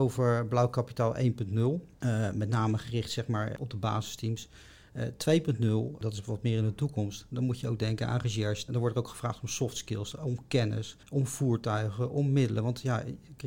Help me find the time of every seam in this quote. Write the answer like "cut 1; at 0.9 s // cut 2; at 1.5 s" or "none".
cut 1; at 8.7 s // cut 2; at 11.0 s